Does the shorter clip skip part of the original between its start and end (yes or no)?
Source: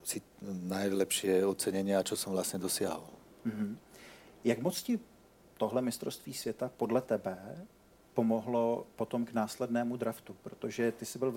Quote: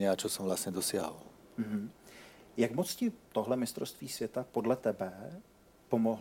yes